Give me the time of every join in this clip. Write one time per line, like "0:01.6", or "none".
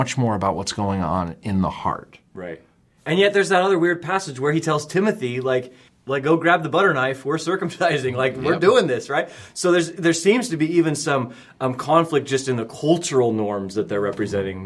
0:05.9